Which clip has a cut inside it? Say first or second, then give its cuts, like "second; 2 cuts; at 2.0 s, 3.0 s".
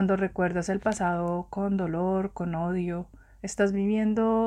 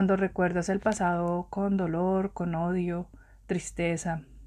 first; 1 cut; at 3.4 s